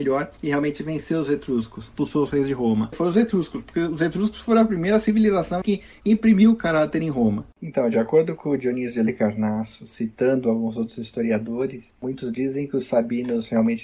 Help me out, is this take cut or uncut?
cut